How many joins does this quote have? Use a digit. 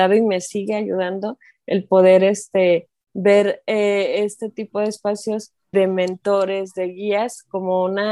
1